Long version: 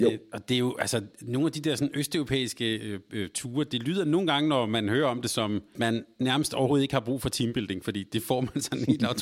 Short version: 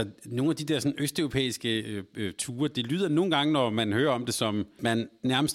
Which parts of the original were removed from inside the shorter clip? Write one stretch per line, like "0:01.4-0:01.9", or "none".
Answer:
none